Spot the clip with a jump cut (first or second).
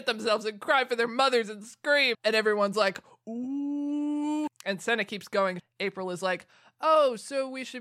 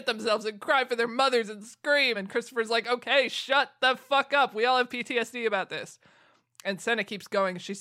first